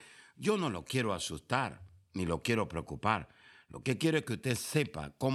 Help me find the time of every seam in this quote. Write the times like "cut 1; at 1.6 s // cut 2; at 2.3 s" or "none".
none